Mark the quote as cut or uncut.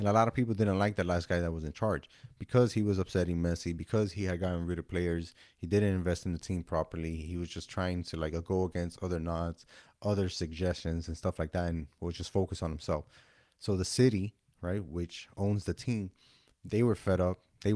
uncut